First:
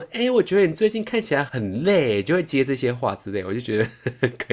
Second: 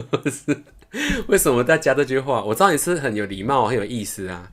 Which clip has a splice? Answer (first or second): first